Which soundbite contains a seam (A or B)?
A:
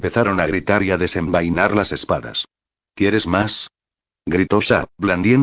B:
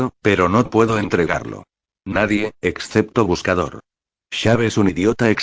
B